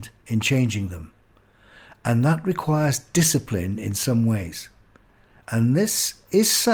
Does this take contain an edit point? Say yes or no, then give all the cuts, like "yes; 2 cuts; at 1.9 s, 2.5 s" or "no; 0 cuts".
no; 0 cuts